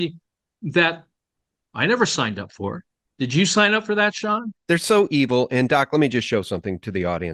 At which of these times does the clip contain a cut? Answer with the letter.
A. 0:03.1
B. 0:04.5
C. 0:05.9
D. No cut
B